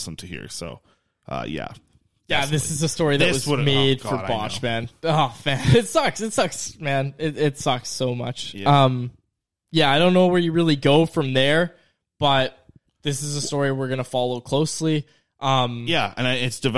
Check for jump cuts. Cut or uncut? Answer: uncut